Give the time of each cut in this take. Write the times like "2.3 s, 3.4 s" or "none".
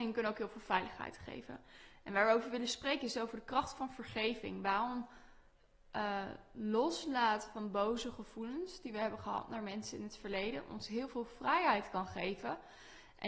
none

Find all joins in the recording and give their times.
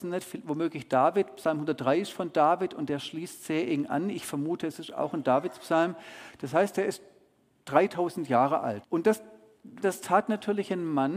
8.8 s, 9.8 s

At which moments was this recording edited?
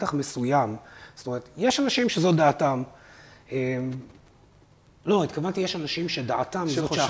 none

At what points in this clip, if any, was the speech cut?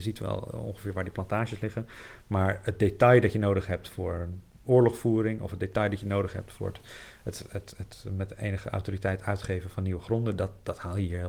none

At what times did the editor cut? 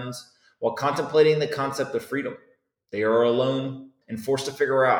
4.0 s

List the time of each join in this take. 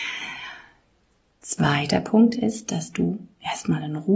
none

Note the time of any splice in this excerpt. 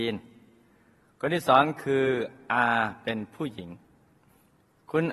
none

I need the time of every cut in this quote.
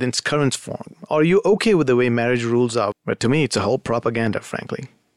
2.9 s

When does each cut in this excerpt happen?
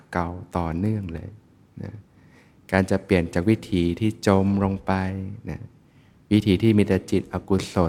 none

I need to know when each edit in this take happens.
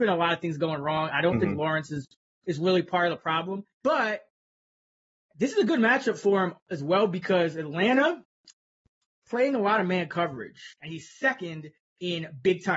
3.7 s, 10.7 s

